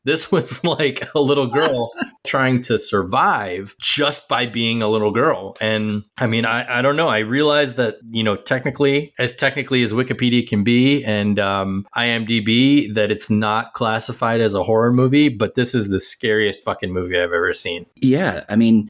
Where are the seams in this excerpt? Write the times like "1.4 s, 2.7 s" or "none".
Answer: none

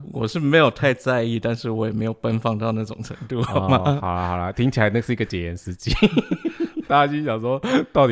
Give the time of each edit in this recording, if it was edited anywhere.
6.9 s

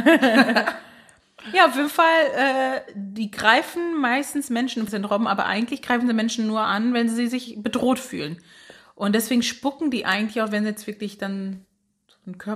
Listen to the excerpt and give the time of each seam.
4.9 s

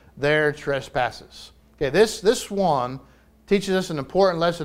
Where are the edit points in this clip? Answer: none

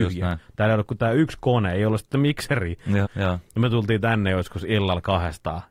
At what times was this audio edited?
3.0 s

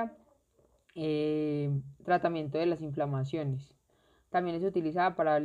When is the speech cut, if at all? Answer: none

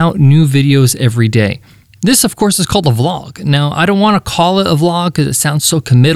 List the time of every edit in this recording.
none

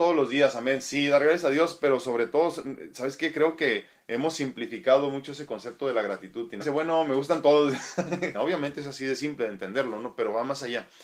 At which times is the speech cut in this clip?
6.6 s, 8.3 s

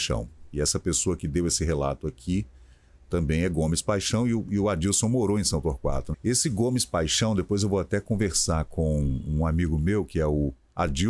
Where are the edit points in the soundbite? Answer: 6.1 s

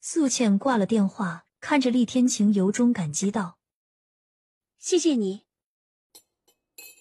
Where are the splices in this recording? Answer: 1.4 s

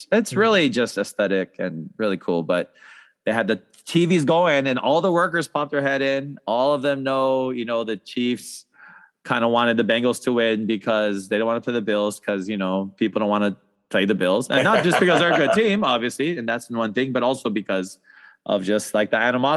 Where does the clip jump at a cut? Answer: none

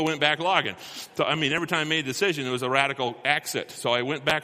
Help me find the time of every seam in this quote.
none

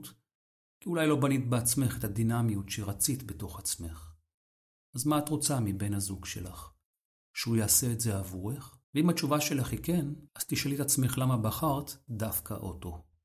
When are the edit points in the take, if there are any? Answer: 8.8 s, 10.3 s

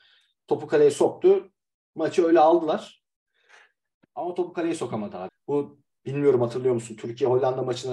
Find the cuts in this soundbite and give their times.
4.0 s, 5.3 s

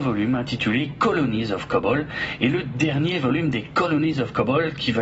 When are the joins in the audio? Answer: none

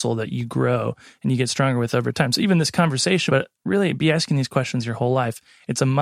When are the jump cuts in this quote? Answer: 3.3 s

